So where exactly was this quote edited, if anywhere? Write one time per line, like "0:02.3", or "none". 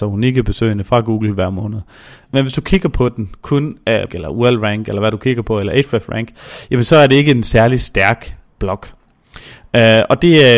0:02.3
0:04.1